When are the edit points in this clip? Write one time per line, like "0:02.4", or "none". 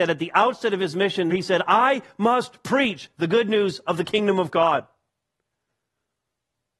0:01.3